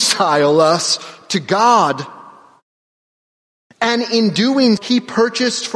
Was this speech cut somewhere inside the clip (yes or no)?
yes